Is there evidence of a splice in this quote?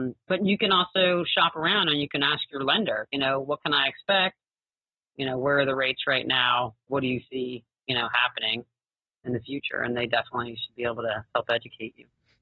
no; 0 cuts

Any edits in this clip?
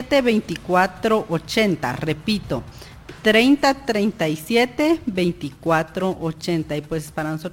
no; 0 cuts

